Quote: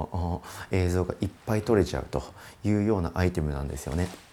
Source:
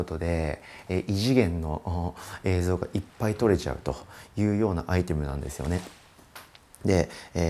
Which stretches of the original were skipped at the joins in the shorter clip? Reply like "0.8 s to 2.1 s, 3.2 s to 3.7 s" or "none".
none